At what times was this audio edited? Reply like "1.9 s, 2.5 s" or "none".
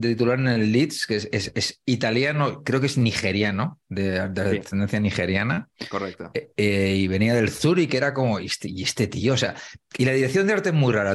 none